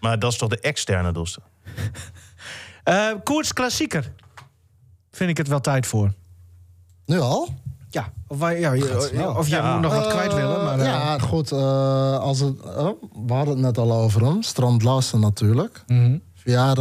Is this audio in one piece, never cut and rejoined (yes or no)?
no